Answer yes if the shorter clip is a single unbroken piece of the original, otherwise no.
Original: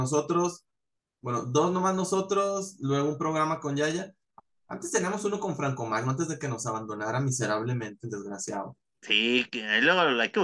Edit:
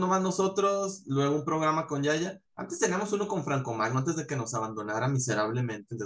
no